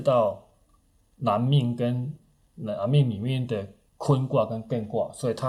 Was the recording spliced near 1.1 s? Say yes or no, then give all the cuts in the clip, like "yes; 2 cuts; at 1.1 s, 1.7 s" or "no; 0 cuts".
no; 0 cuts